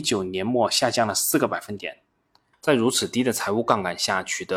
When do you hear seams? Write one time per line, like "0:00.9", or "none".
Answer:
0:02.5